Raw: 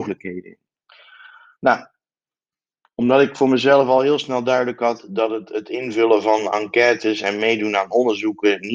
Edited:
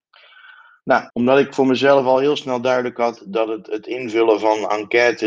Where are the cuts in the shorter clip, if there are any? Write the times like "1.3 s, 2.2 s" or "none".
1.1 s